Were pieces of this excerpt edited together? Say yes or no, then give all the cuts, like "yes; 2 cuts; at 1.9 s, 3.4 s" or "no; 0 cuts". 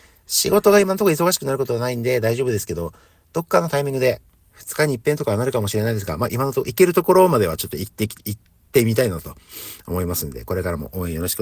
no; 0 cuts